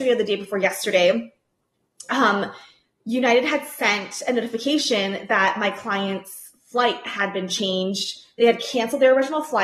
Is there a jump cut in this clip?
no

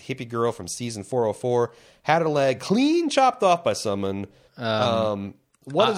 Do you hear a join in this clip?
yes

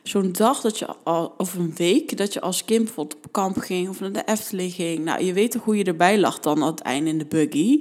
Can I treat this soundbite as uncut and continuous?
yes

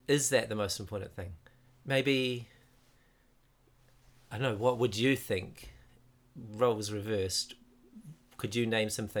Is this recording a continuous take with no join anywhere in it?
yes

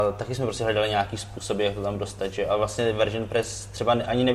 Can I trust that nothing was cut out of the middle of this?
yes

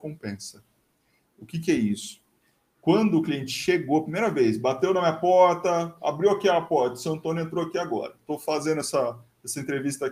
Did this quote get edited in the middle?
no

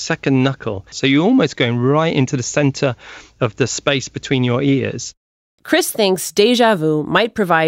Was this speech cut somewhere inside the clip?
yes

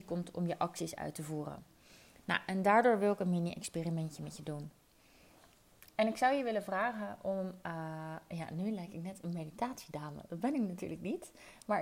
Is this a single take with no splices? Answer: yes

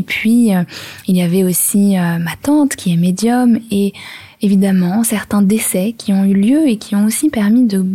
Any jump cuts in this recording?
no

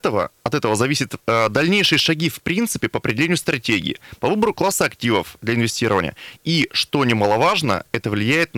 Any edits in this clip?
no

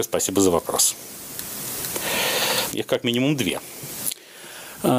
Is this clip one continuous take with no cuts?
no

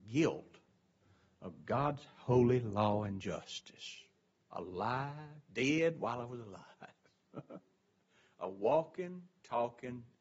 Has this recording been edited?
no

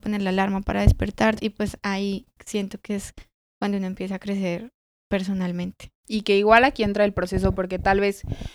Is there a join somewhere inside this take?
yes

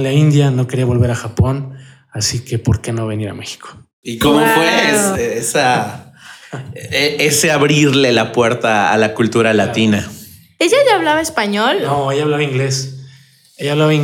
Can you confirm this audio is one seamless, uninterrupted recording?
yes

